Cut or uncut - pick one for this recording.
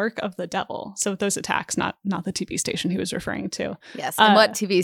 uncut